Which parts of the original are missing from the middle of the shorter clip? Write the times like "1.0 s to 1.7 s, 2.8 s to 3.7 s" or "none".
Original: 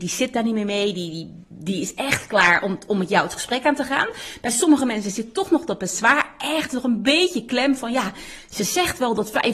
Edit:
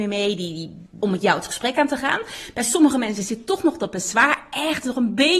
1.6 s to 2.9 s